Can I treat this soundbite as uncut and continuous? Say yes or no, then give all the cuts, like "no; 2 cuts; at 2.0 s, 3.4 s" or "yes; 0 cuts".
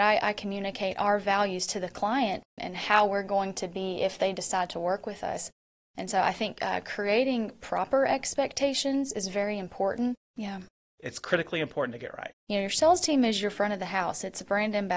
no; 3 cuts; at 2.6 s, 10.3 s, 12.3 s